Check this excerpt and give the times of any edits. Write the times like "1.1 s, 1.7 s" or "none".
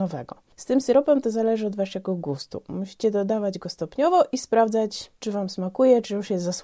5.2 s